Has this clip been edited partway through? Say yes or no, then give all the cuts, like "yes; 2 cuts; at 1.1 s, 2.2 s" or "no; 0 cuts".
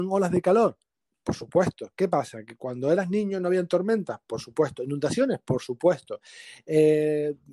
no; 0 cuts